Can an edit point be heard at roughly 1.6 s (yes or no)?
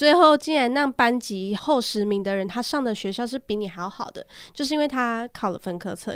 yes